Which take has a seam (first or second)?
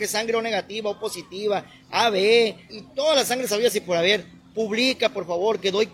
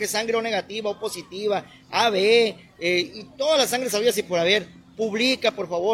first